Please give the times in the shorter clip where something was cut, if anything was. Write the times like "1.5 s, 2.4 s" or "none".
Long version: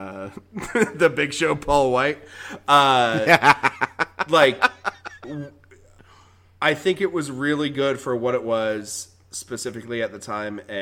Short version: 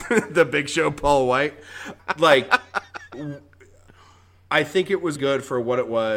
2.0 s, 5.2 s